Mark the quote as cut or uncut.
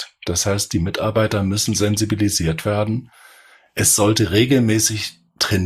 uncut